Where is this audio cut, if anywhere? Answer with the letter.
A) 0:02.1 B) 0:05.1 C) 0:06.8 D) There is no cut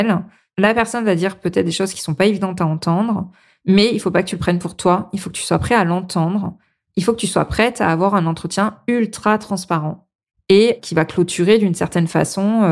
D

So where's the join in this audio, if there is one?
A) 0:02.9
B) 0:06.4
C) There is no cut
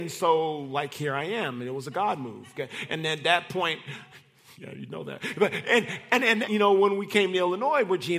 B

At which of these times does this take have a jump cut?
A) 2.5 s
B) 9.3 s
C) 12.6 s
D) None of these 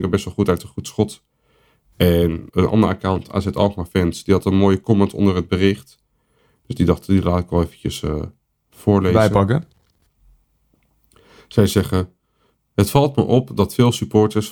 A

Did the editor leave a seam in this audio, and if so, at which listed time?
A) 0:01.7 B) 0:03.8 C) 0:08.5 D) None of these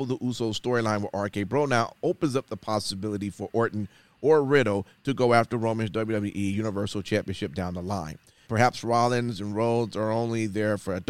C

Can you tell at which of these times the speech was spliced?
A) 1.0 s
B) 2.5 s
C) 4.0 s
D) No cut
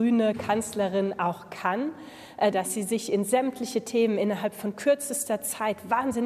B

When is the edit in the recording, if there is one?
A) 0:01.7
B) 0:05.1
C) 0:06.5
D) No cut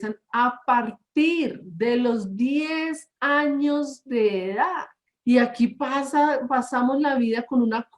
B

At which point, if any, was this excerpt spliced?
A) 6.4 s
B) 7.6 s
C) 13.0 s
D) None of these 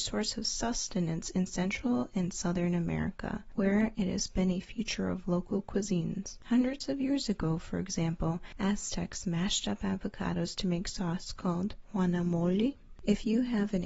C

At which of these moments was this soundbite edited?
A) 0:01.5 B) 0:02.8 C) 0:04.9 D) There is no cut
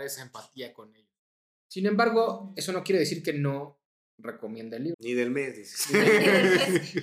C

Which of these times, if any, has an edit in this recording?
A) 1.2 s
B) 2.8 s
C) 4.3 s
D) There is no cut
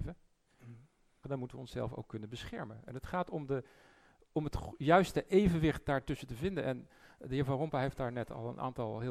A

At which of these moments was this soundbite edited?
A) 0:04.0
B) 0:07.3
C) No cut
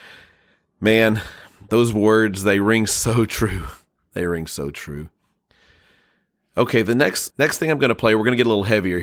B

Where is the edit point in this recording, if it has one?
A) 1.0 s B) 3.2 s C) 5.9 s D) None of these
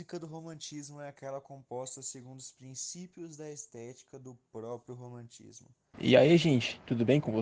C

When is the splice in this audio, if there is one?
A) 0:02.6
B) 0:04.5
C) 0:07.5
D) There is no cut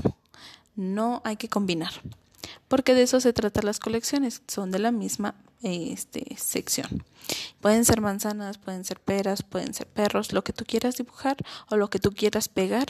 C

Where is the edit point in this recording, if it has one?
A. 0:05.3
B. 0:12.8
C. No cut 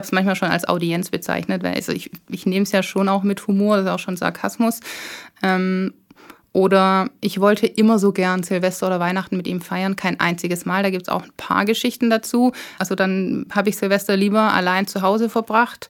B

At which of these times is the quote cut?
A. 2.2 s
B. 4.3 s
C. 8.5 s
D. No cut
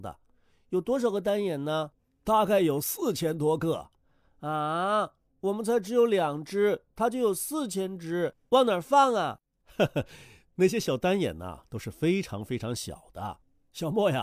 C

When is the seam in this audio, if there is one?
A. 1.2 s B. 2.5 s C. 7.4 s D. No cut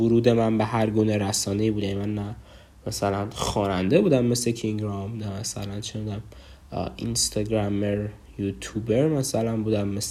D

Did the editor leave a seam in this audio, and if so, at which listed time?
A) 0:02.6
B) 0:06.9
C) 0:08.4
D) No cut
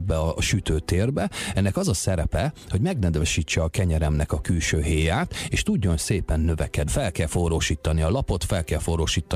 B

